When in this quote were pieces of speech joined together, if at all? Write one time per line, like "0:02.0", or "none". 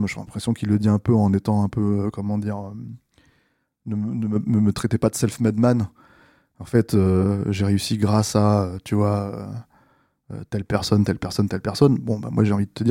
none

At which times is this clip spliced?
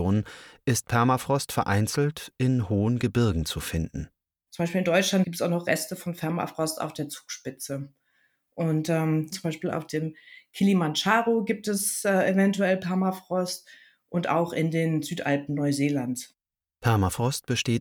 0:09.3

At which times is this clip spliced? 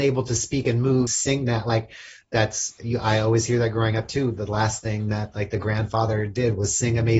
0:01.1

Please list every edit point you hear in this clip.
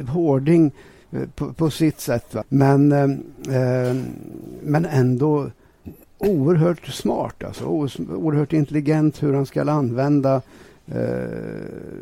0:02.4

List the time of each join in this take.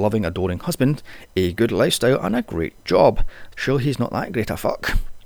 0:03.5

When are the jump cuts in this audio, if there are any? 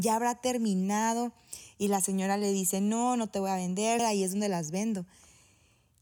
0:04.0

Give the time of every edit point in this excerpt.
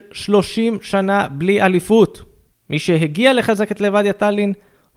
0:02.5

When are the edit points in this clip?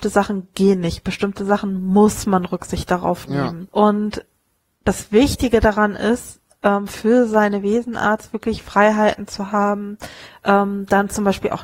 0:03.7

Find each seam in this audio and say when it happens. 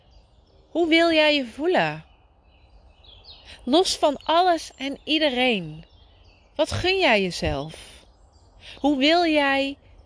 none

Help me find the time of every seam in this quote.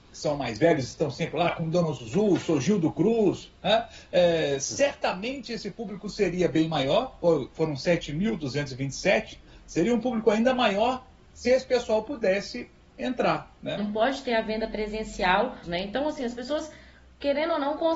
0:13.8
0:15.6

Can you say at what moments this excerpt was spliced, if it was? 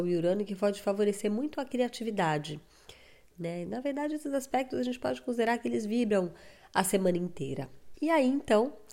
0:03.3
0:07.9

